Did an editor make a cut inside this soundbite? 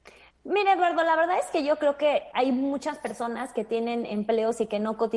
yes; 1 cut; at 2.3 s

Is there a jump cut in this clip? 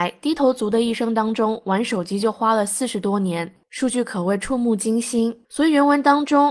yes; 1 cut; at 5.4 s

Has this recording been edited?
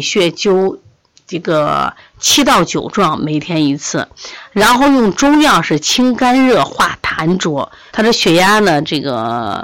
yes; 1 cut; at 7.9 s

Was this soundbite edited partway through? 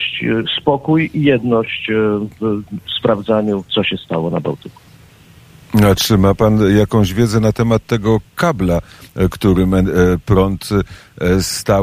no; 0 cuts

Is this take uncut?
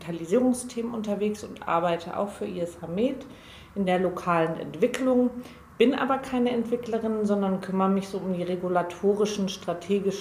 yes; 0 cuts

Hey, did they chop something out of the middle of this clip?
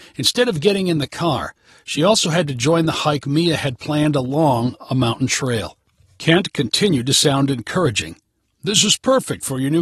no; 0 cuts

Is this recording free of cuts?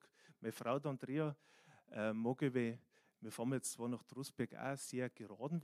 yes; 0 cuts

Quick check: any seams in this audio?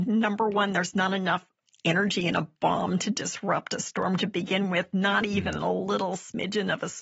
no; 0 cuts

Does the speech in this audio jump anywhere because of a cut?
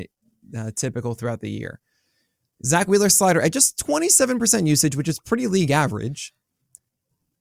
no; 0 cuts

